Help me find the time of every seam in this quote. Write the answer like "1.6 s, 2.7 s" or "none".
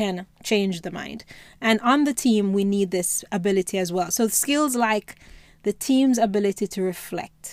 none